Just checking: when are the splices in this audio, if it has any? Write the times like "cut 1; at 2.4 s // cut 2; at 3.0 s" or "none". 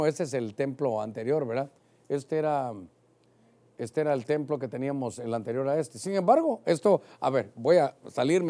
none

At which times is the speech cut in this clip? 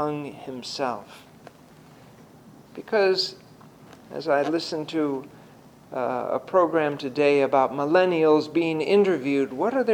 cut 1; at 2.7 s

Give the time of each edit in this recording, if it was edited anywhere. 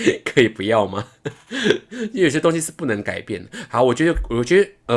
none

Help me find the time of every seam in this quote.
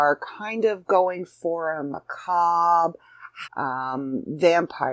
cut 1; at 3.4 s

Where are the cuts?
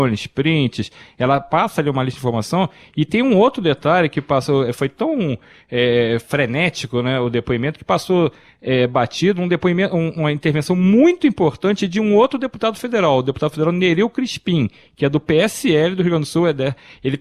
none

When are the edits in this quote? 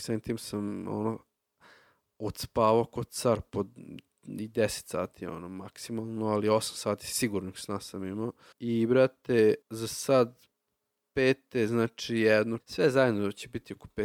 cut 1; at 8.5 s // cut 2; at 9.6 s // cut 3; at 12.6 s

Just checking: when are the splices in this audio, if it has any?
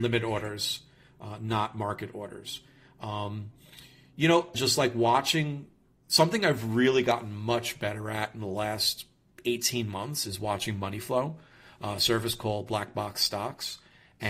cut 1; at 4.5 s // cut 2; at 12.0 s

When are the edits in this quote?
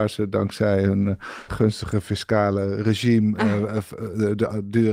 cut 1; at 1.5 s

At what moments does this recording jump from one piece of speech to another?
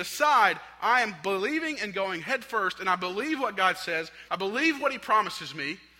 cut 1; at 4.3 s

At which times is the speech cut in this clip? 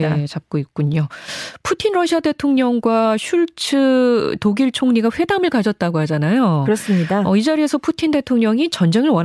none

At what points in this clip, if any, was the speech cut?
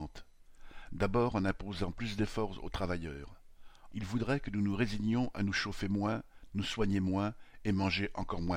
cut 1; at 3.9 s // cut 2; at 6.5 s

